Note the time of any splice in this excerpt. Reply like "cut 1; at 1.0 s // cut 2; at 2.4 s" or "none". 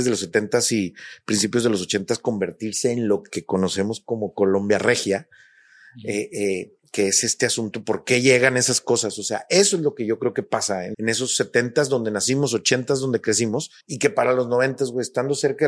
cut 1; at 10.9 s // cut 2; at 13.8 s